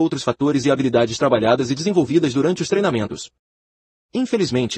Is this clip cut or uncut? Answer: uncut